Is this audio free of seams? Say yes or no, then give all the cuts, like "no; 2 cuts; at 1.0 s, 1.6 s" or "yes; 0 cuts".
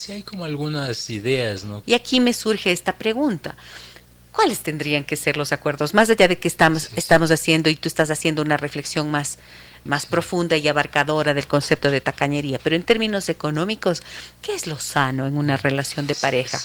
no; 2 cuts; at 1.8 s, 9.9 s